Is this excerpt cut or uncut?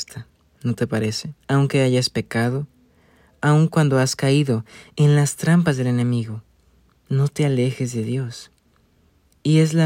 cut